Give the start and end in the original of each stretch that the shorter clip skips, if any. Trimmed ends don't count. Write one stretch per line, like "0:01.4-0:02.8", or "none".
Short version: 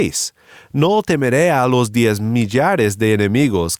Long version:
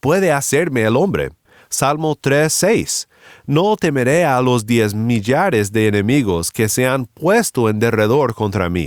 none